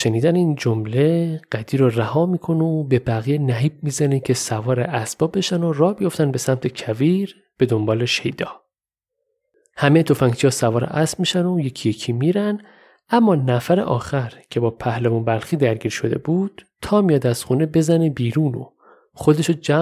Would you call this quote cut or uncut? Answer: uncut